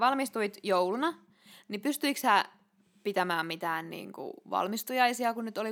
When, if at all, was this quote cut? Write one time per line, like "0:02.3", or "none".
none